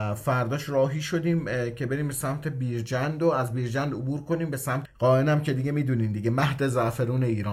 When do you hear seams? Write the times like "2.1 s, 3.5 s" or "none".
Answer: 4.8 s